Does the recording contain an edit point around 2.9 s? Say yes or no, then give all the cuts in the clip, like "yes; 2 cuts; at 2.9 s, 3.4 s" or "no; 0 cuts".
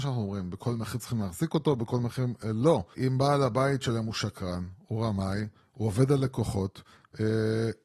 yes; 1 cut; at 2.9 s